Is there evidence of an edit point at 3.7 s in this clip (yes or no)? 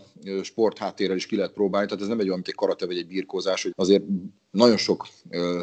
yes